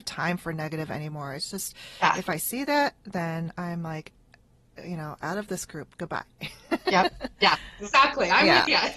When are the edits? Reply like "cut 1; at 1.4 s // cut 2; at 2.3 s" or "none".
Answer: none

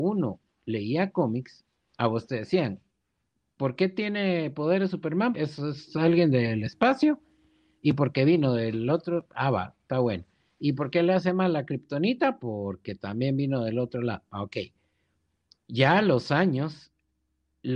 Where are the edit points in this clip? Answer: cut 1; at 5.3 s

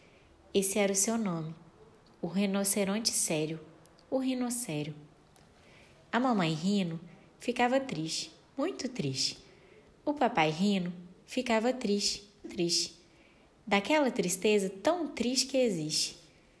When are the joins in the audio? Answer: cut 1; at 12.4 s

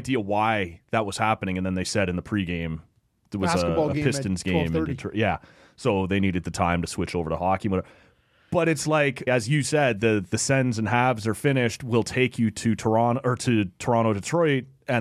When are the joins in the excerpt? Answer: cut 1; at 9.3 s

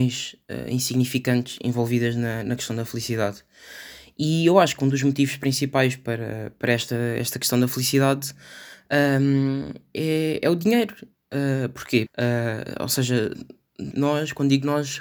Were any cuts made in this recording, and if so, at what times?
cut 1; at 12.1 s // cut 2; at 13.9 s

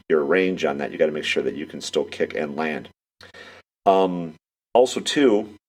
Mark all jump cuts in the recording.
none

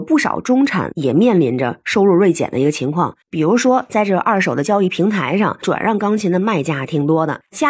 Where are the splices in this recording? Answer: cut 1; at 3.2 s

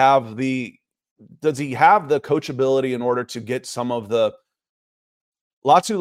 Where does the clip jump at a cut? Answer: none

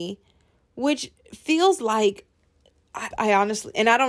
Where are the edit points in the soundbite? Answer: cut 1; at 3.1 s

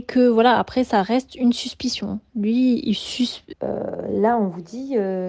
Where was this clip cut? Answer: cut 1; at 3.5 s

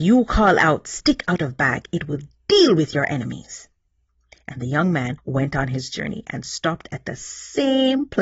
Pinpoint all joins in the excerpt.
none

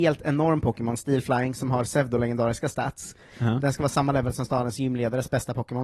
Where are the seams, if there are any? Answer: cut 1; at 3.3 s

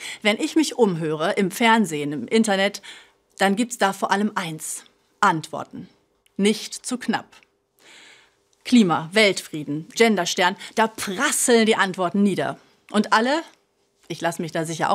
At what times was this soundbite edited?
cut 1; at 9.9 s

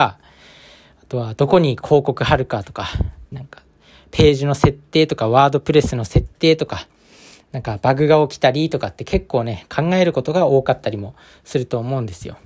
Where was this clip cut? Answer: cut 1; at 3.3 s

